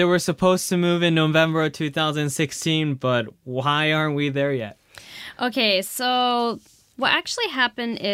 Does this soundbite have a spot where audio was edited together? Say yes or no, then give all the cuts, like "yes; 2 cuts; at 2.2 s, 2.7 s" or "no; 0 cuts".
no; 0 cuts